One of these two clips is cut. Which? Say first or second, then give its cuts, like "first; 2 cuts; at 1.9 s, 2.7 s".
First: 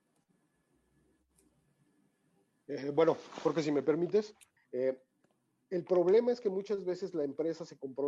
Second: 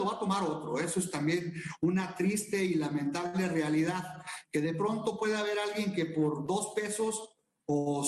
first; 1 cut; at 4.6 s